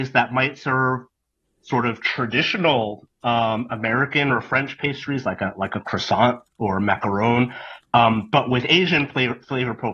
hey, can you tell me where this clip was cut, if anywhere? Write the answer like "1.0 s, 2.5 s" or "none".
none